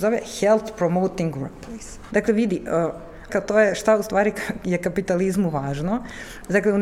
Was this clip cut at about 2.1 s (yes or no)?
yes